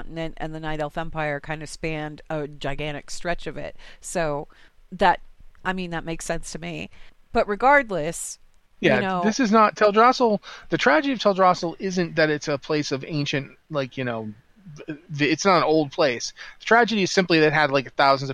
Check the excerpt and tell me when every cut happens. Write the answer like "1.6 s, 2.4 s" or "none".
none